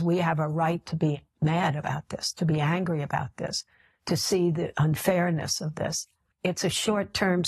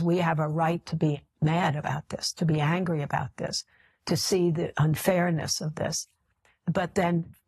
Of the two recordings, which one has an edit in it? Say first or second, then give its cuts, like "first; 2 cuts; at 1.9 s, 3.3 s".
first; 1 cut; at 6.3 s